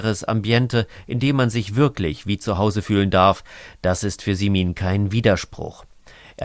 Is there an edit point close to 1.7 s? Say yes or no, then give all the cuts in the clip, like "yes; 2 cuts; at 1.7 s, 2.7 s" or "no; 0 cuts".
no; 0 cuts